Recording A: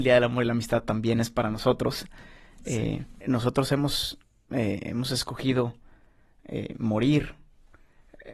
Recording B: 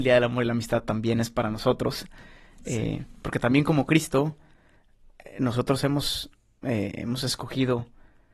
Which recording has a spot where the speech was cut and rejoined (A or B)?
A